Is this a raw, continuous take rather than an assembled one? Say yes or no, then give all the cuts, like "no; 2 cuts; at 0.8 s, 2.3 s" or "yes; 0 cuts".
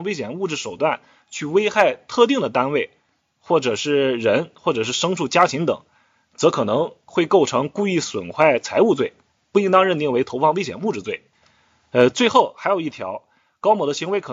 yes; 0 cuts